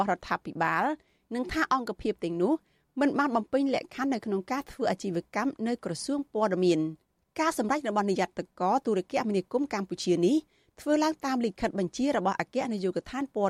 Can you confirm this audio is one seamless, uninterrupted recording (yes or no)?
yes